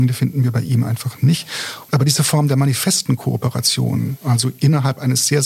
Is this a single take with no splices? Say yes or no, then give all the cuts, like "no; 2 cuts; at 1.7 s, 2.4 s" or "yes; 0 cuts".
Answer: no; 1 cut; at 1.9 s